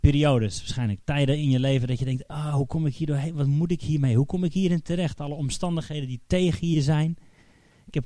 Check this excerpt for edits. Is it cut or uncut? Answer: uncut